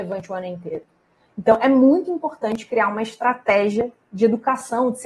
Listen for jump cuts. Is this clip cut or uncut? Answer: uncut